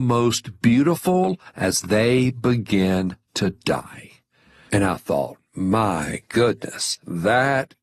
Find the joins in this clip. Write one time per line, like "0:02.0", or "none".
none